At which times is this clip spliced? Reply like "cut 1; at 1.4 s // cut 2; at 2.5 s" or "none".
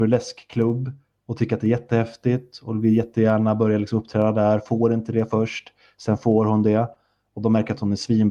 none